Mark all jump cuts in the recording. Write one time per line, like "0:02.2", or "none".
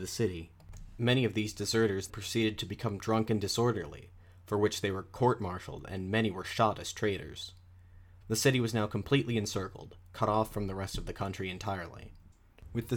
0:02.1
0:08.2